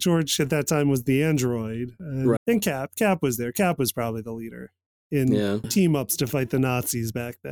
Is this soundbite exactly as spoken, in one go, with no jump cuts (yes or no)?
no